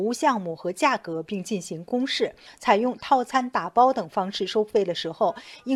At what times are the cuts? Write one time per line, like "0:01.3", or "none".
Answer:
none